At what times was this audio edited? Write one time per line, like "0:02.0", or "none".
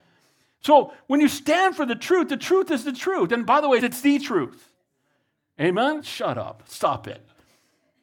0:03.8
0:06.0